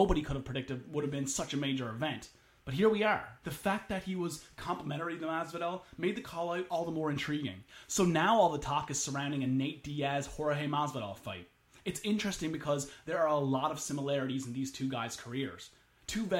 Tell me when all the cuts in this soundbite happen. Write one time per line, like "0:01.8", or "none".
0:03.4